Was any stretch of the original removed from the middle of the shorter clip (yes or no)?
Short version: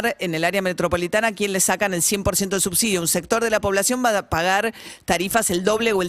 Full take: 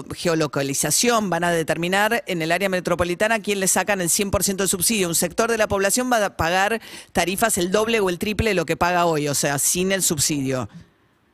no